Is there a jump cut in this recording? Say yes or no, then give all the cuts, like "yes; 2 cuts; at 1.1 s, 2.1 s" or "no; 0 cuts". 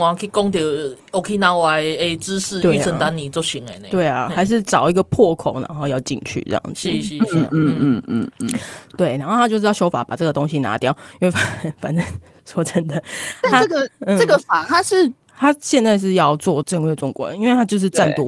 yes; 2 cuts; at 15.3 s, 16.6 s